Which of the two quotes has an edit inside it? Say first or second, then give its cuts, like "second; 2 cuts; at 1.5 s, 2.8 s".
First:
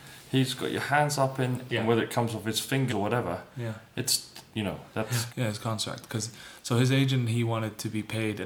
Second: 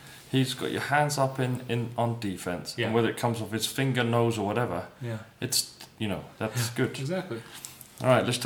first; 3 cuts; at 1.7 s, 2.9 s, 5.3 s